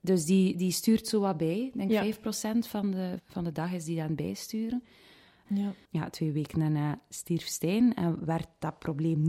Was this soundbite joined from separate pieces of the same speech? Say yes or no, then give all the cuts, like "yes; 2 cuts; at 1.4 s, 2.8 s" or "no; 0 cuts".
yes; 2 cuts; at 3.2 s, 5.4 s